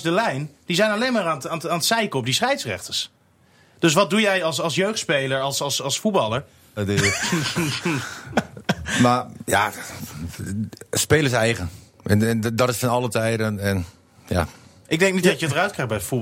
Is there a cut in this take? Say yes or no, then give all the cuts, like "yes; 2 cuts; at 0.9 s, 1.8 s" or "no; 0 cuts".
yes; 1 cut; at 6.8 s